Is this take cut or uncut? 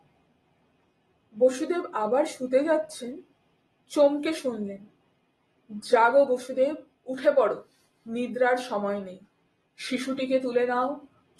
cut